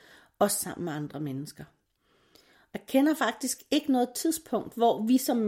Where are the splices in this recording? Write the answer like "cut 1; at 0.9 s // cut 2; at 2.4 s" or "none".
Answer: none